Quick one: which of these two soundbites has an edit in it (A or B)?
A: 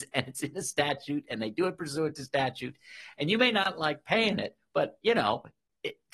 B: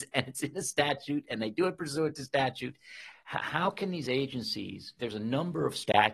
B